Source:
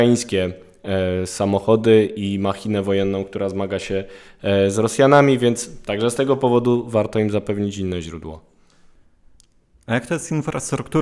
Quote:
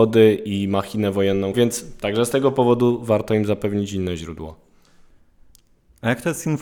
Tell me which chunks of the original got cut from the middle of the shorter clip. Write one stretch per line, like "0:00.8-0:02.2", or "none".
0:03.2-0:05.4